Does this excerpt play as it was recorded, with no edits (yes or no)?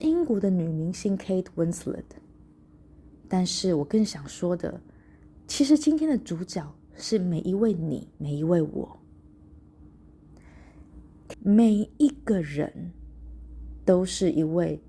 no